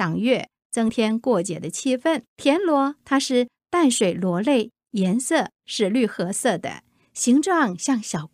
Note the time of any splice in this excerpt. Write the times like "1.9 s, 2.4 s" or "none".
2.3 s